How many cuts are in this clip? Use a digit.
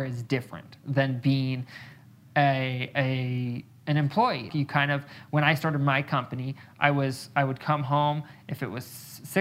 1